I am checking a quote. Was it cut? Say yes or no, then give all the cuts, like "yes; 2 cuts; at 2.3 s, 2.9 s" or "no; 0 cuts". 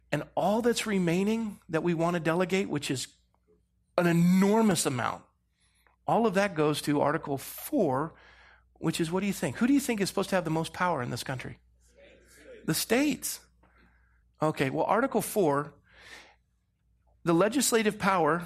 yes; 1 cut; at 14.2 s